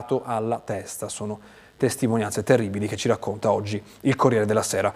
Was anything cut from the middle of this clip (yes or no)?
no